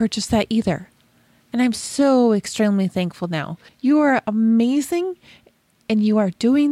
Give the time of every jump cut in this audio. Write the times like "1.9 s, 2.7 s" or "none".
3.7 s